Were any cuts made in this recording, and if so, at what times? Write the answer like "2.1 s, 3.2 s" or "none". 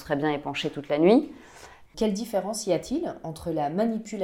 1.9 s